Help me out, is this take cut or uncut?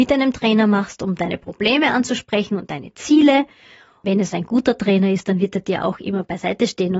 uncut